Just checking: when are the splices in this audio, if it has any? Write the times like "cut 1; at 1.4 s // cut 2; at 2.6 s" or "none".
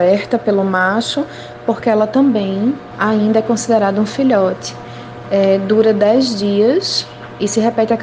cut 1; at 2.9 s // cut 2; at 5.2 s